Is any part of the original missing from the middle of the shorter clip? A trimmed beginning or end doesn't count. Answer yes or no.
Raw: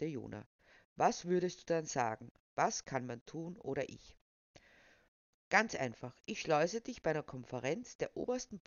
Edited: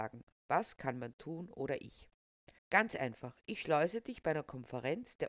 yes